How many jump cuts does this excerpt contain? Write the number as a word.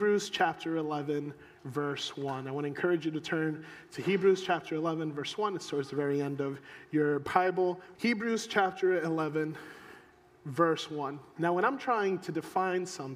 two